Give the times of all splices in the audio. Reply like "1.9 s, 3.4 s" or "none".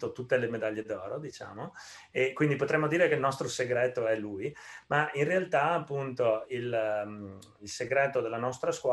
none

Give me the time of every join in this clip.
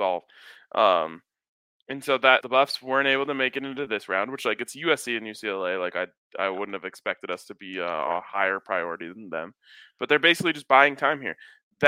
2.4 s

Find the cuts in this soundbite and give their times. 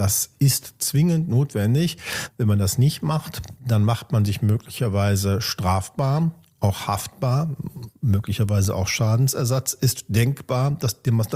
none

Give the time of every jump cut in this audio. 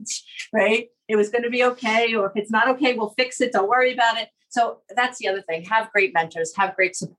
none

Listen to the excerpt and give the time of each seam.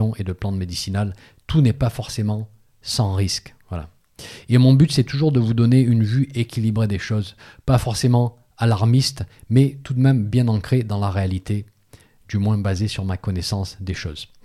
none

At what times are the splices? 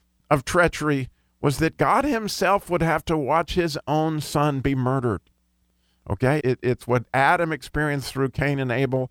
6.4 s

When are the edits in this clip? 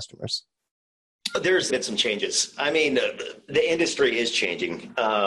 1.7 s, 3.5 s

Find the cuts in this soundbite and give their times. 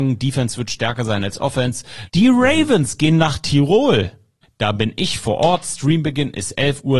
2.1 s, 4.4 s

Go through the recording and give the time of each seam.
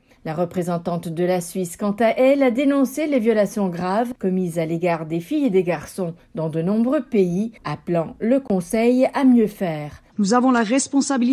10.1 s

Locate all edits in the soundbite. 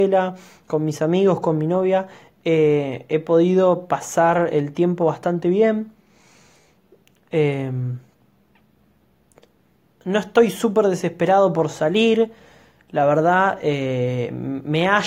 none

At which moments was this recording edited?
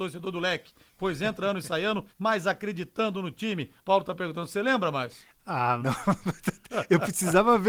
2.1 s, 3.8 s, 5.8 s

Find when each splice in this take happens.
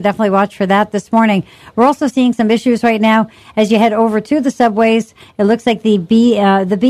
2.1 s

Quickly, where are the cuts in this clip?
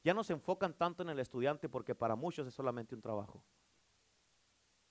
none

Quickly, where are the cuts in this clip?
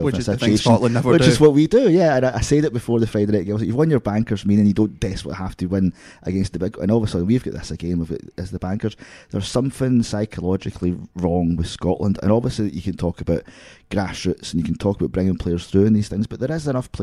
none

